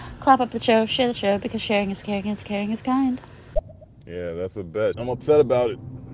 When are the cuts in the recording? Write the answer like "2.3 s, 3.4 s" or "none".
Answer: 4.9 s